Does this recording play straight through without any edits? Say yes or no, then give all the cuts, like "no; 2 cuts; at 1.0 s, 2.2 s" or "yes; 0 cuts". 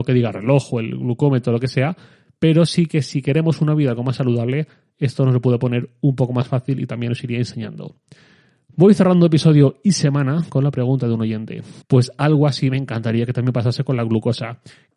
no; 1 cut; at 11.8 s